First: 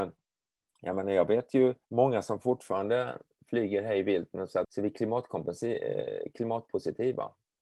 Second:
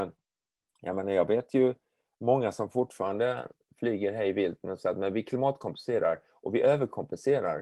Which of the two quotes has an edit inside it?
first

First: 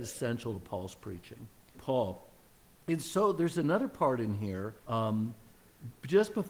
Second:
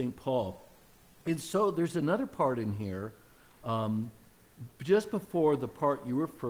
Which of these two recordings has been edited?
first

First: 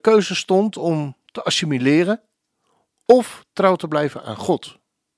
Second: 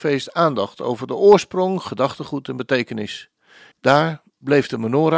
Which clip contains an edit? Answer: second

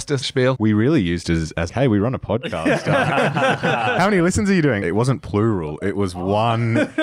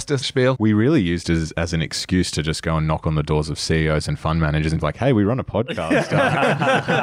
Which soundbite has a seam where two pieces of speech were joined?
first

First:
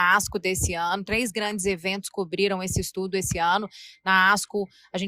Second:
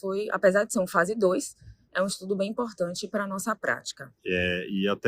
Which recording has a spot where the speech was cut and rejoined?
second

